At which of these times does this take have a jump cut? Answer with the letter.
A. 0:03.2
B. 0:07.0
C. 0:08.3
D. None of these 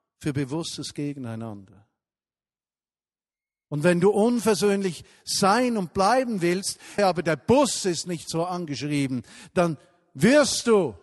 B